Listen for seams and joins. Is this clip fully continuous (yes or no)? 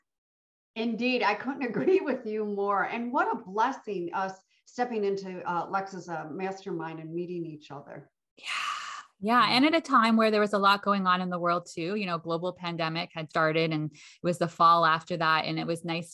no